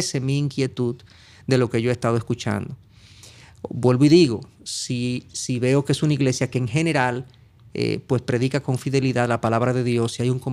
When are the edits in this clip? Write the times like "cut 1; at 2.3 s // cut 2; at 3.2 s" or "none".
none